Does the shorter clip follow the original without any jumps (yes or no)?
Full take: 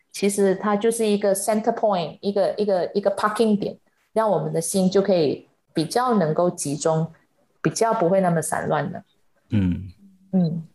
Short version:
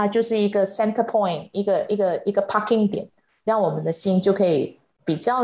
yes